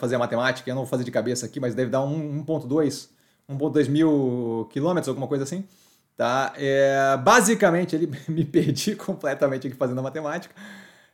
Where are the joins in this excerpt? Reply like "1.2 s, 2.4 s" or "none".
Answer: none